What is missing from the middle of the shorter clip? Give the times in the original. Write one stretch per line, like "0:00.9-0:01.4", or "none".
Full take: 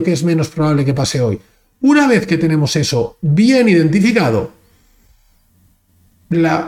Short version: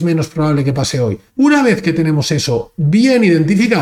0:01.5-0:01.7